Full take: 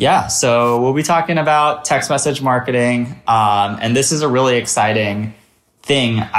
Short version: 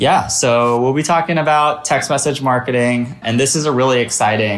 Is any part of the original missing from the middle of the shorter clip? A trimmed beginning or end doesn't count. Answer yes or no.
yes